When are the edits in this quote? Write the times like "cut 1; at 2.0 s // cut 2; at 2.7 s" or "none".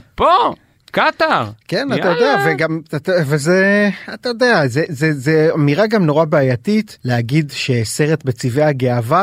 cut 1; at 7.0 s